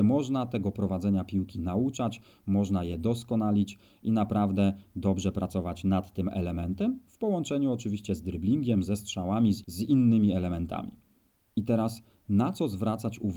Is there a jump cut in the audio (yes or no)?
no